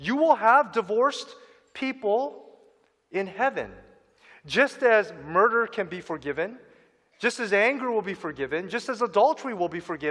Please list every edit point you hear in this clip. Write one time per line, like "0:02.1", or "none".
none